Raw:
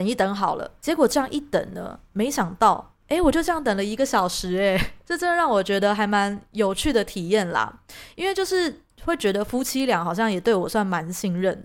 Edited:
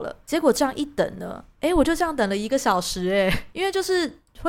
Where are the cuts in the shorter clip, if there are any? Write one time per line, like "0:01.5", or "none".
0:01.5
0:03.5